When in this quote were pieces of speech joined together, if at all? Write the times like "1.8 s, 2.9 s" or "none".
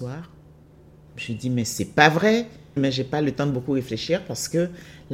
1.1 s, 2.8 s